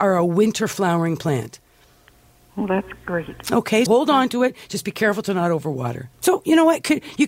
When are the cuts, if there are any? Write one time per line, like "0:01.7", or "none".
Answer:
0:03.9
0:06.1